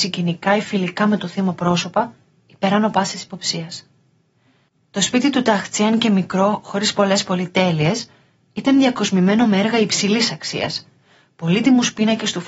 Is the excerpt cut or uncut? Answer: uncut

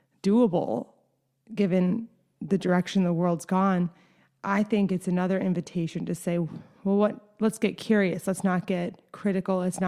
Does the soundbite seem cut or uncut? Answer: uncut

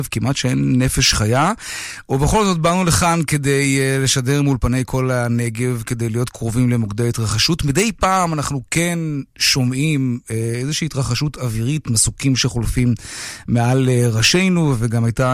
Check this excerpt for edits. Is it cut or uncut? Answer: uncut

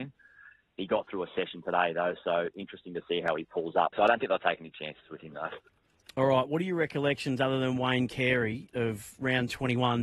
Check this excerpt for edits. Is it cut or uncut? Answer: cut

